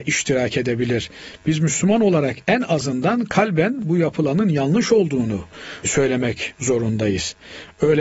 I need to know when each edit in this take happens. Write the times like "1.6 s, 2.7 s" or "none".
5.8 s